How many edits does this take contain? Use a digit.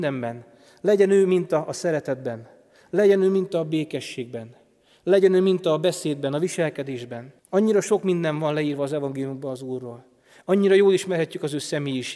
1